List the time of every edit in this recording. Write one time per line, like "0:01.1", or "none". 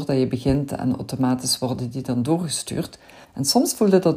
0:03.2